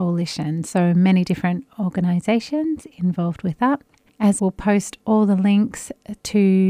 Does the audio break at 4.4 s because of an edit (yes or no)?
yes